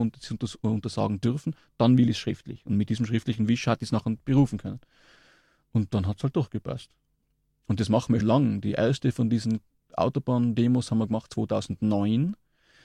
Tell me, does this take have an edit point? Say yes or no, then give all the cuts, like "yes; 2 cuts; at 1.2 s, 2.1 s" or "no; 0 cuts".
yes; 1 cut; at 8.2 s